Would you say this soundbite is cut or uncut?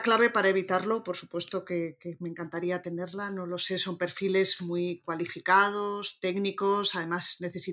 uncut